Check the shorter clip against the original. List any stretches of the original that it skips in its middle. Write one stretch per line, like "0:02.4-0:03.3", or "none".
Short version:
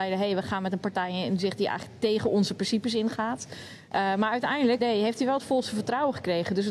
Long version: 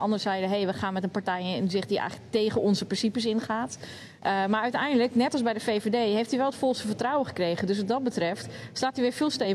0:05.1-0:05.9